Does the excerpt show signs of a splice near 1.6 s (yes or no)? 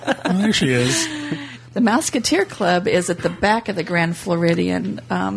yes